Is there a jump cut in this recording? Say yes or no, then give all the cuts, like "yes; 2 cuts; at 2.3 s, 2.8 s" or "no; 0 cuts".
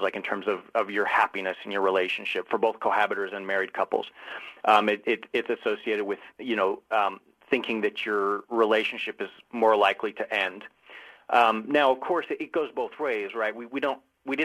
no; 0 cuts